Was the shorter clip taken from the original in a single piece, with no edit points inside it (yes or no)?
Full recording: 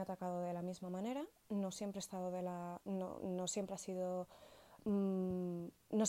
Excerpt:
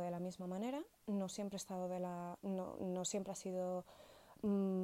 yes